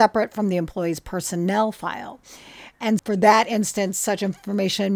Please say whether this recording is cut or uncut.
cut